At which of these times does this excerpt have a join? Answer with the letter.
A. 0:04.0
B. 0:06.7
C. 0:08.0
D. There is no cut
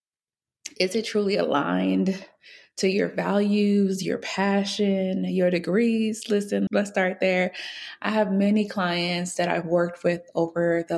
B